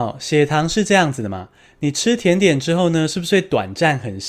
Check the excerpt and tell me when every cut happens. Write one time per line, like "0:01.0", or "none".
none